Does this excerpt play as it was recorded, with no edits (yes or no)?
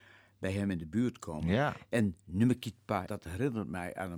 no